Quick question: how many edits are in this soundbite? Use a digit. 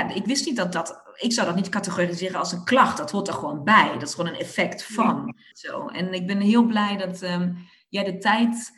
1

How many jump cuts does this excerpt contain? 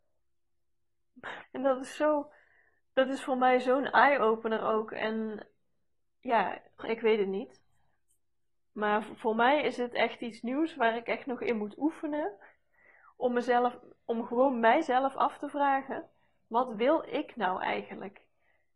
2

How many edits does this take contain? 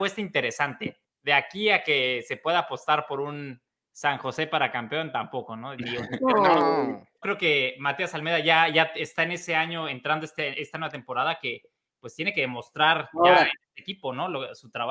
1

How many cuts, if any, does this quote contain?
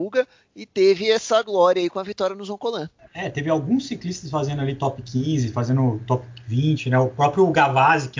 0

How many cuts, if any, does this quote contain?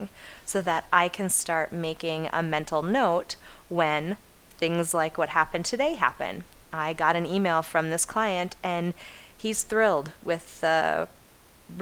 0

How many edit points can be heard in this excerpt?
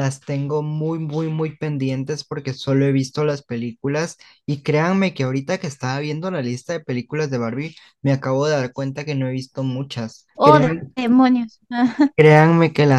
1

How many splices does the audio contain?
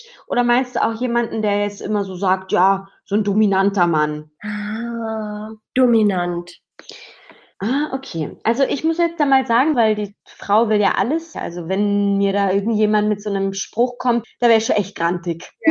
3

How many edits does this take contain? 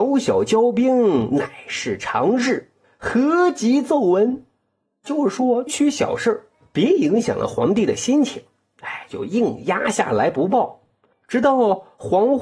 1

